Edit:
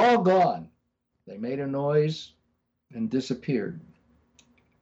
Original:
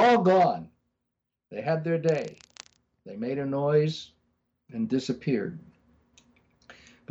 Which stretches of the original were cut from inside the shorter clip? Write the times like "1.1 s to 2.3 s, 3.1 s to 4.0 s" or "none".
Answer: 1.1 s to 2.9 s